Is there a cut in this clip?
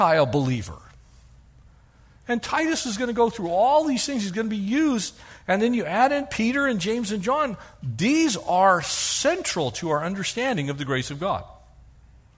no; 0 cuts

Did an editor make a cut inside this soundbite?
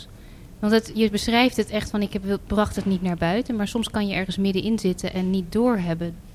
yes; 1 cut; at 0.9 s

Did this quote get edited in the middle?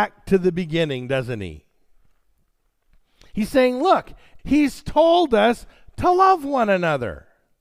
yes; 1 cut; at 4.4 s

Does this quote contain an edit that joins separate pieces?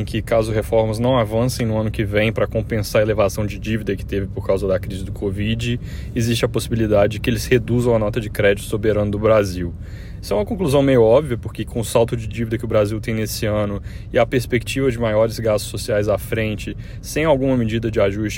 no; 0 cuts

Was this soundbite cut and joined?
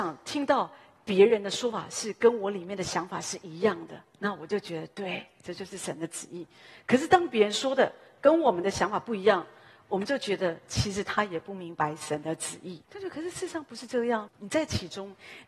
yes; 2 cuts; at 12.8 s, 14.3 s

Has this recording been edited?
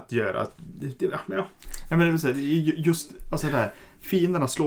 no; 0 cuts

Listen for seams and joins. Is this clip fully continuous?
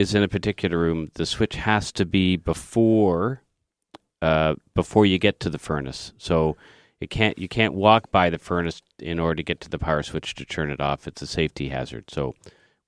yes; 0 cuts

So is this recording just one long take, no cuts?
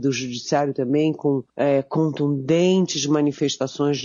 no; 1 cut; at 1.5 s

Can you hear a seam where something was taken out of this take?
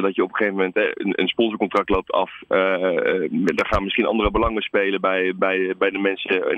no; 0 cuts

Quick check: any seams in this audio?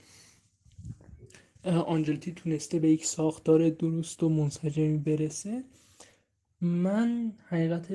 no; 0 cuts

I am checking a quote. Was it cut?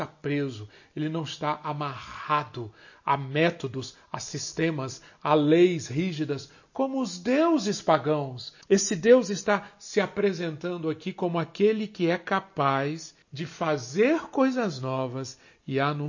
yes; 2 cuts; at 8.6 s, 13.2 s

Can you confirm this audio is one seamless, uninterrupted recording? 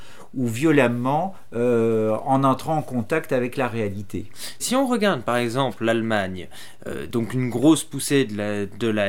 no; 1 cut; at 4.6 s

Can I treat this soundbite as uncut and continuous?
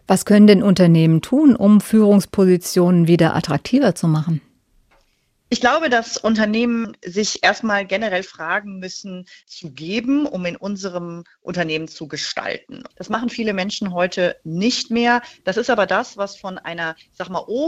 no; 2 cuts; at 9.4 s, 12.9 s

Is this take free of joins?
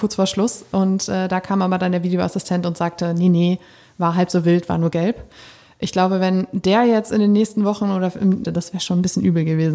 no; 1 cut; at 8.4 s

